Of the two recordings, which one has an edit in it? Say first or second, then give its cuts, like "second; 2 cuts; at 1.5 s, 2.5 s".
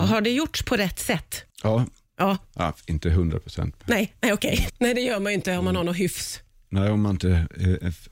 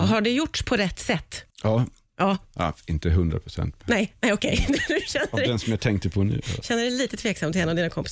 first; 1 cut; at 4.7 s